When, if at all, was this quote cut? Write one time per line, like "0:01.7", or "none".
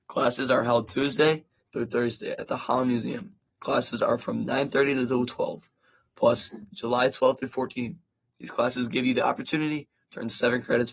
0:06.7